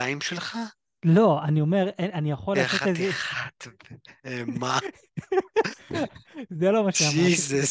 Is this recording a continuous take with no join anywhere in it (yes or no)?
yes